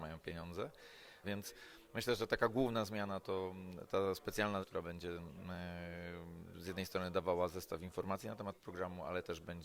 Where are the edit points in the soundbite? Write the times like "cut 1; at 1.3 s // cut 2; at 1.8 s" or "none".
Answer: cut 1; at 1.2 s // cut 2; at 4.6 s